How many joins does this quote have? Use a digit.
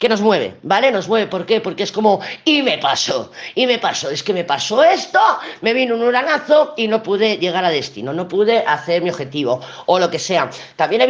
0